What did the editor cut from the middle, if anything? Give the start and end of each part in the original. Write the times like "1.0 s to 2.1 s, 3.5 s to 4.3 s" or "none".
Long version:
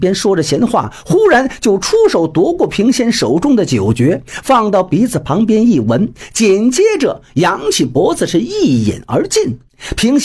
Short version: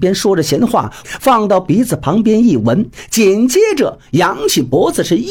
1.0 s to 4.3 s